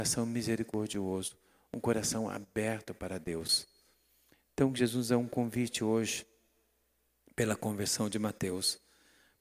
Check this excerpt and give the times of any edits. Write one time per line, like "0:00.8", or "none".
none